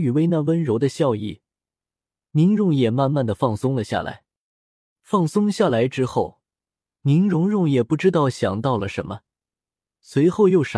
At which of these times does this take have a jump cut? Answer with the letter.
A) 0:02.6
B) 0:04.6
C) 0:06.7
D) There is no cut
A